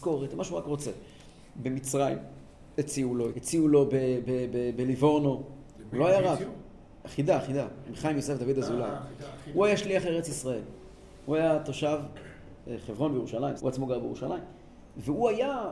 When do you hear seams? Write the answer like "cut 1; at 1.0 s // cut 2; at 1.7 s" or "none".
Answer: cut 1; at 3.3 s // cut 2; at 7.0 s // cut 3; at 13.6 s